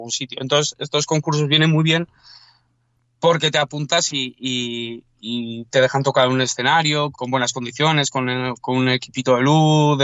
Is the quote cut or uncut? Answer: cut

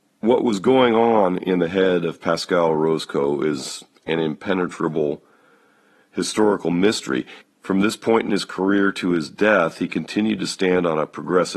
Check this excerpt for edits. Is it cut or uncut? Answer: cut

